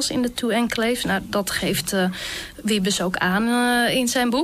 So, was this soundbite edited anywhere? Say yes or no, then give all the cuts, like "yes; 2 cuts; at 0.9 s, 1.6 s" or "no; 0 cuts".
no; 0 cuts